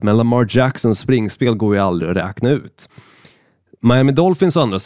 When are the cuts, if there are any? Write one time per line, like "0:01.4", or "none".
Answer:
none